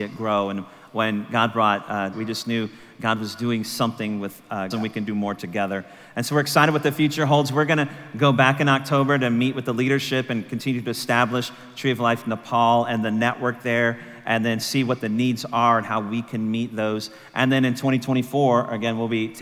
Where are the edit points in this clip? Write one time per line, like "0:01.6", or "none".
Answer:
0:02.1
0:04.7